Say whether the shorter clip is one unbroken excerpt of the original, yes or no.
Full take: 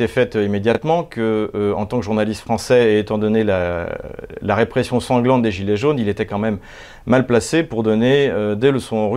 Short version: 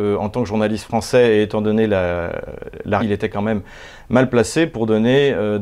no